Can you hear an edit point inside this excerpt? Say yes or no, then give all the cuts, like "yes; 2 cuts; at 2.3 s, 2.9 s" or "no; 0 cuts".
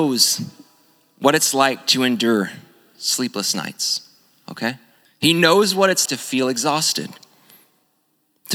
yes; 2 cuts; at 5.0 s, 6.1 s